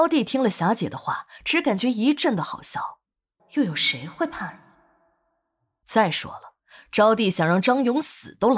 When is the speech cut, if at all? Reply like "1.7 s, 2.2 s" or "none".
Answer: 3.4 s